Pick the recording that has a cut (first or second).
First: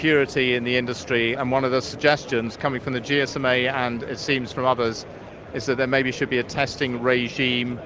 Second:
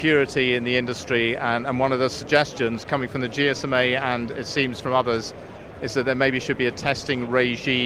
first